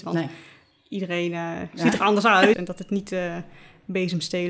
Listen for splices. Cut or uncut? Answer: cut